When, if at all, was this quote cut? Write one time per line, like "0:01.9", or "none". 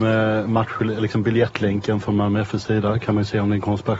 none